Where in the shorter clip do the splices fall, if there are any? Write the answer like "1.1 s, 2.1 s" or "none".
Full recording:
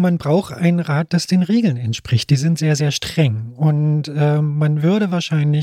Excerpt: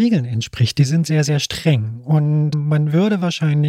2.5 s